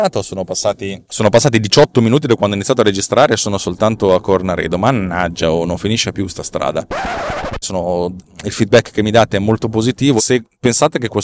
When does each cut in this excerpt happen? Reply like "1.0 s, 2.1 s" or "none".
7.6 s, 10.2 s